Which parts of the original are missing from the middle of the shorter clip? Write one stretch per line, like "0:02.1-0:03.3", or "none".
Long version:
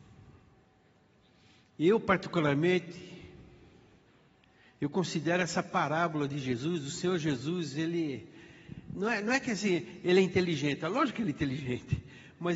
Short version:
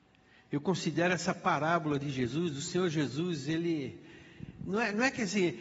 none